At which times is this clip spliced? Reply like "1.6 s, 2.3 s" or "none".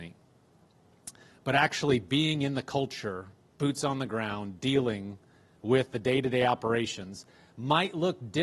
none